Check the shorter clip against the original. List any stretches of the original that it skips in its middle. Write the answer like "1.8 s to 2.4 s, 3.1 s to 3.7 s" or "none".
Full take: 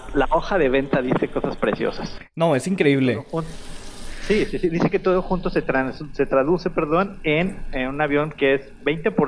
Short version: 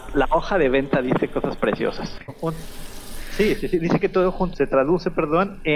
2.3 s to 3.2 s, 5.4 s to 6.1 s